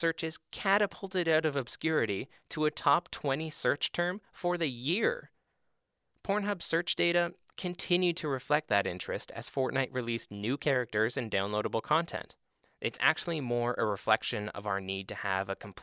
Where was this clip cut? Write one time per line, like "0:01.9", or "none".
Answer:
0:12.6